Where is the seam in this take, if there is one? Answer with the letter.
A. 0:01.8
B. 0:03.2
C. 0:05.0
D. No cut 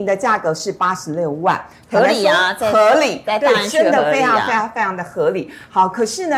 D